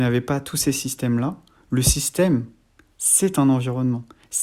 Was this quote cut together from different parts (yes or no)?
no